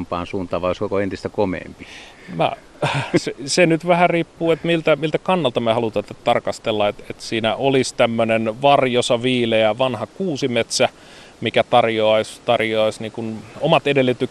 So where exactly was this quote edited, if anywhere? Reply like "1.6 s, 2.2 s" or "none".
none